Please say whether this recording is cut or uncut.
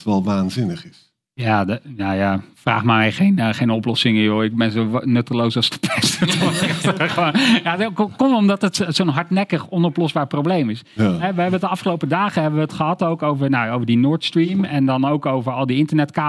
uncut